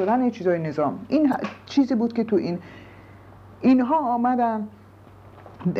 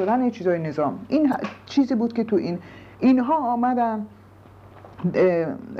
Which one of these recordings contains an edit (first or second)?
second